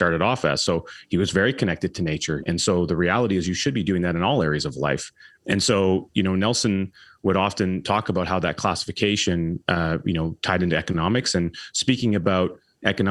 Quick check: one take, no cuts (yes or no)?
no